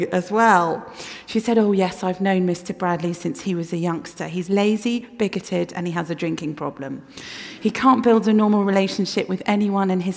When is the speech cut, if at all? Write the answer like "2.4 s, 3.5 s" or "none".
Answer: none